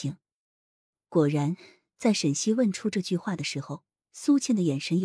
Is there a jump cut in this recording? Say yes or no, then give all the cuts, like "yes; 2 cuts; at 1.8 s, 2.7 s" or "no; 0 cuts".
no; 0 cuts